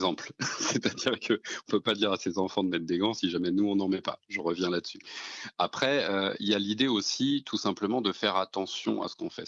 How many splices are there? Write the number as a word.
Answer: zero